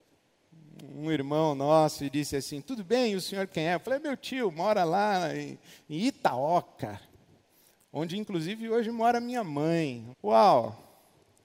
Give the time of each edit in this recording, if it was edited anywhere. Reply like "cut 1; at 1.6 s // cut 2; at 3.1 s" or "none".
cut 1; at 10.1 s